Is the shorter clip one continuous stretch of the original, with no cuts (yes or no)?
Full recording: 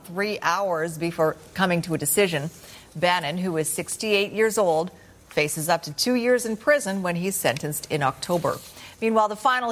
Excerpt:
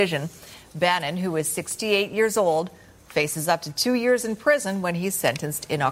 yes